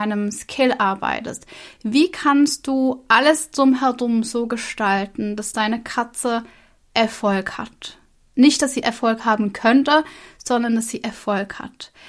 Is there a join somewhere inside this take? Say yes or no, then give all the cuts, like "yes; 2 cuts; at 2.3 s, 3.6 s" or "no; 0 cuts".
no; 0 cuts